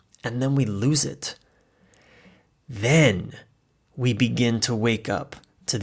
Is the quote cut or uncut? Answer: uncut